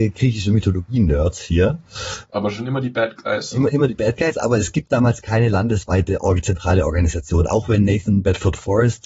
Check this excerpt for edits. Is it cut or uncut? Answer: uncut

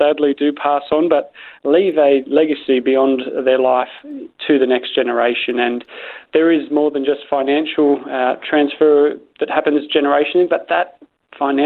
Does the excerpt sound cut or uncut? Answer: uncut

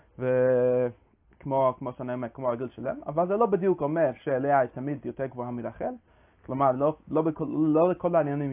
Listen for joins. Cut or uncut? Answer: uncut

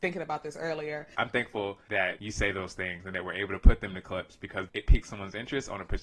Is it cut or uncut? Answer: cut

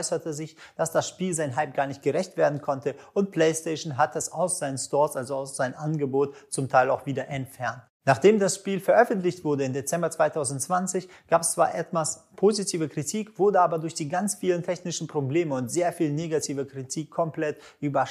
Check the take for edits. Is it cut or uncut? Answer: cut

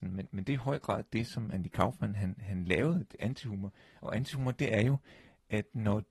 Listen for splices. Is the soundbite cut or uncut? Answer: uncut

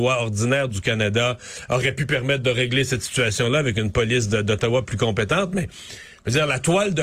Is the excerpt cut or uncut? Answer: uncut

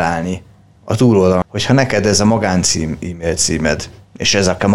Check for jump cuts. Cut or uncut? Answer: cut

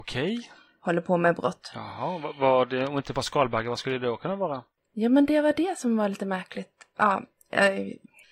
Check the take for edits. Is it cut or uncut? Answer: uncut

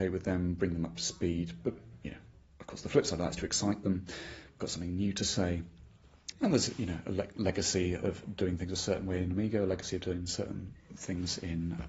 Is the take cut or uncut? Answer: cut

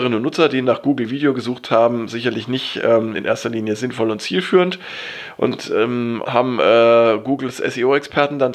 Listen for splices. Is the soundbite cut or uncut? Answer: cut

